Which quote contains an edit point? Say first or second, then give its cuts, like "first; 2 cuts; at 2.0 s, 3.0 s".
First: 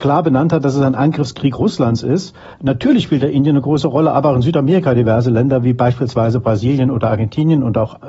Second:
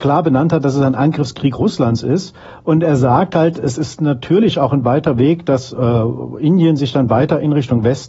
first; 1 cut; at 2.5 s